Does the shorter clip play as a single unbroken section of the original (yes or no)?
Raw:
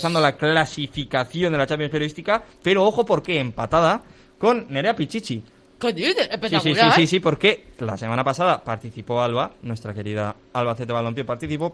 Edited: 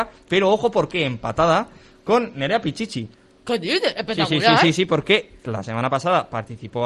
yes